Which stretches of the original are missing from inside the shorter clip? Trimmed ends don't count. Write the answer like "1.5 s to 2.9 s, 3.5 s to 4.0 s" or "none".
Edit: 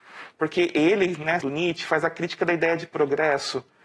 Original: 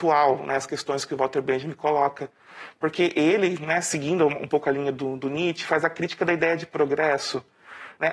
3.8 s to 5.2 s